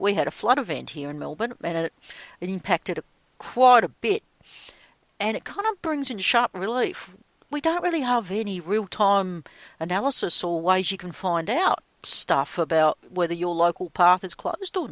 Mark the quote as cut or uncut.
uncut